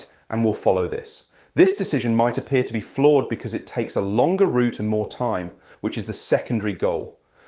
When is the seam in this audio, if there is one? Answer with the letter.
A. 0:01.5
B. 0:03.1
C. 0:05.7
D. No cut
C